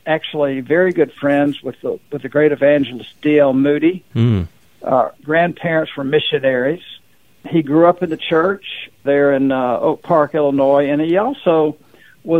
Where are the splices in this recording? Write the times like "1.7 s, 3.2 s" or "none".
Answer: 5.2 s